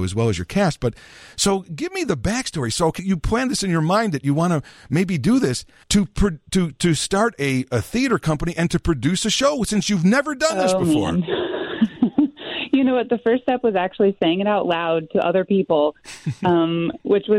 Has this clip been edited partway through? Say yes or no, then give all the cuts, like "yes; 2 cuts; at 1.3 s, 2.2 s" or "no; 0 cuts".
yes; 2 cuts; at 3.0 s, 5.8 s